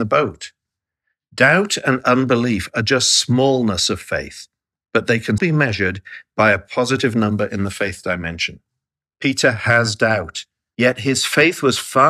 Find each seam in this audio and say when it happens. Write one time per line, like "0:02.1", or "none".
0:05.4
0:09.1
0:10.7